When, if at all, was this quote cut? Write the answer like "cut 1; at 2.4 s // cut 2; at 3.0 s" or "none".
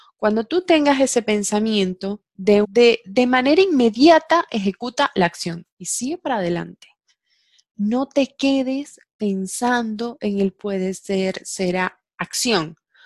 cut 1; at 2.6 s // cut 2; at 5.6 s